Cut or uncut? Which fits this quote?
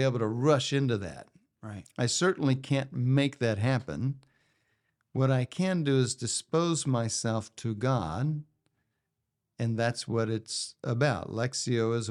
uncut